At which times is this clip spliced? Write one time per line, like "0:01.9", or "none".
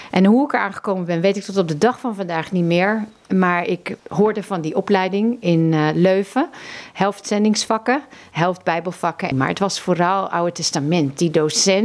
0:04.0
0:09.3

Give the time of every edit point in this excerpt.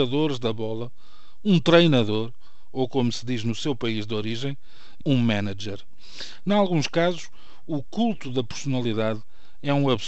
0:05.0

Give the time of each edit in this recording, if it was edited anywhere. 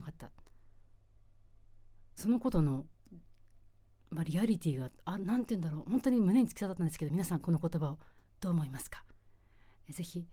0:05.0

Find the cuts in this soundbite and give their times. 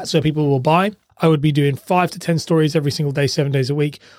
0:01.1

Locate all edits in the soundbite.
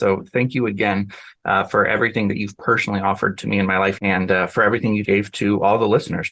0:04.0
0:05.0

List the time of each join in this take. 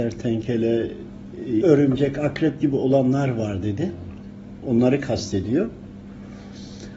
0:01.6
0:04.6

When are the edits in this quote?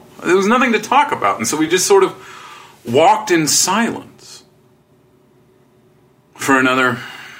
none

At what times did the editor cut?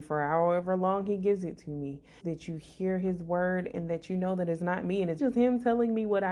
0:02.2
0:05.2

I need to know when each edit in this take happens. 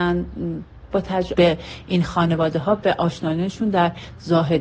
0:01.3

